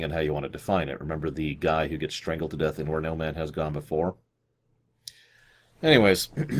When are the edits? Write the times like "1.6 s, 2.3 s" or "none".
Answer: none